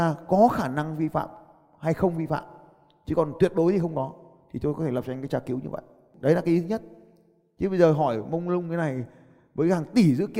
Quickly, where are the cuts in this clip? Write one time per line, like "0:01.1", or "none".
none